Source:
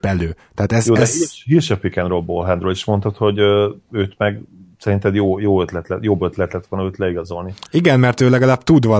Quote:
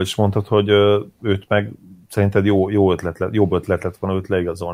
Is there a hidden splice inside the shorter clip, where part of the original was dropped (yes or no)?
no